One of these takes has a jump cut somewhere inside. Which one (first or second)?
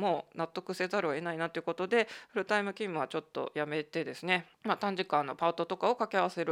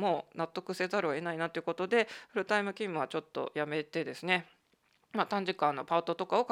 first